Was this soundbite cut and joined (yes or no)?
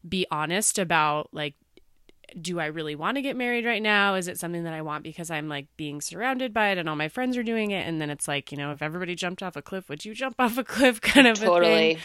no